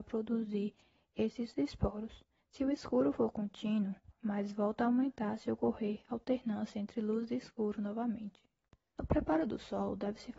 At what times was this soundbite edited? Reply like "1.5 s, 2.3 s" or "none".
2.4 s, 4.1 s, 8.9 s